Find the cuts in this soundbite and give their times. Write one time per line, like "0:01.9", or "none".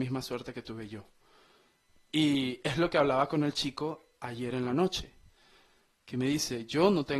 none